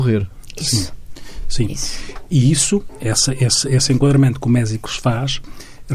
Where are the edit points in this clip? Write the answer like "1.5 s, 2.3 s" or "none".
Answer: none